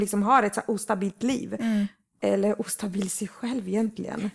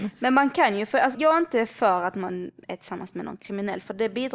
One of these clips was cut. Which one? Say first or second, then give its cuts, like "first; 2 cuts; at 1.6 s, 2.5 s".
second; 1 cut; at 1.1 s